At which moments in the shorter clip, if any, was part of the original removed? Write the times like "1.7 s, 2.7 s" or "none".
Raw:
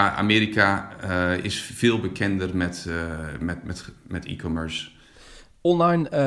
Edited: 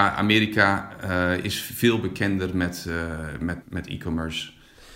3.6 s